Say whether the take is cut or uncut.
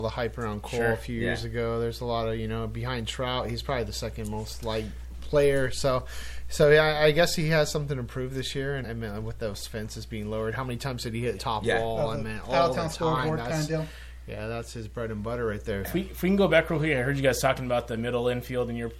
cut